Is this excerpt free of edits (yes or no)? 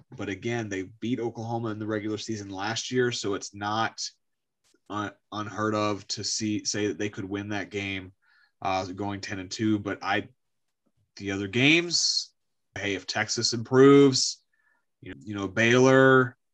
no